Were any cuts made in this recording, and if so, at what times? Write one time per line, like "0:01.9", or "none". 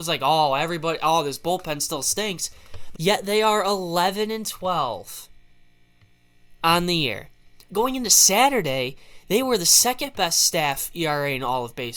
0:02.9
0:07.7